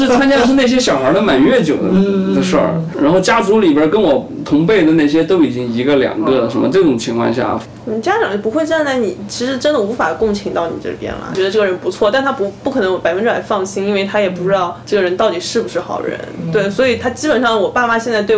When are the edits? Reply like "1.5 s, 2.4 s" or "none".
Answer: 2.9 s, 11.3 s